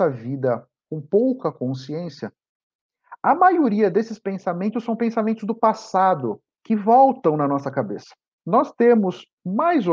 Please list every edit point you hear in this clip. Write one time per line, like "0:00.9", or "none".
0:08.4